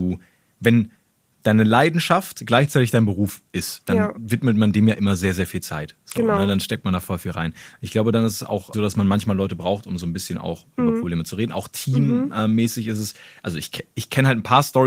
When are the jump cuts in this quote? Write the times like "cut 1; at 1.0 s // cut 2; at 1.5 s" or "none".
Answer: cut 1; at 8.7 s